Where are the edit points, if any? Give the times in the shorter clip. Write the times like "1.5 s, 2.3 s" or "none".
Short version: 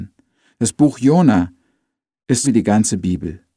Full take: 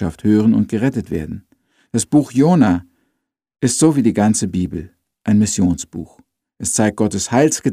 2.4 s